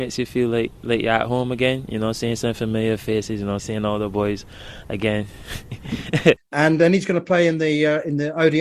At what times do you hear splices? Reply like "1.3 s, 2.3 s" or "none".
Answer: 3.6 s, 6.4 s